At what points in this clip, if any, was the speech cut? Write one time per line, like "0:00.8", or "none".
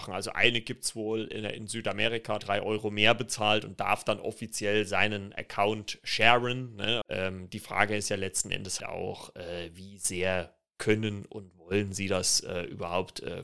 0:02.4
0:07.0
0:08.8